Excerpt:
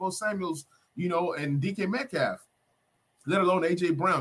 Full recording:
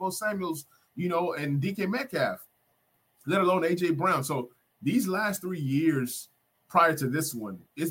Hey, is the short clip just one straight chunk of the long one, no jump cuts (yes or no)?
yes